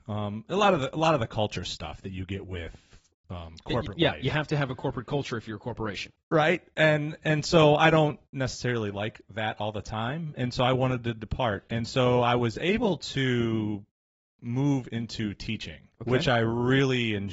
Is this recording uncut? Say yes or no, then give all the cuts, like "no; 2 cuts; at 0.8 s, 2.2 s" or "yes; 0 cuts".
no; 1 cut; at 15.9 s